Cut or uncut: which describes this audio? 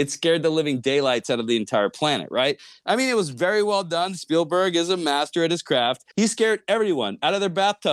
cut